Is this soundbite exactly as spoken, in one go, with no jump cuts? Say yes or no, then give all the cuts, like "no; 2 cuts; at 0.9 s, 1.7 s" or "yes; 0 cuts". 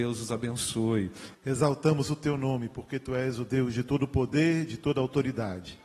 no; 1 cut; at 1.3 s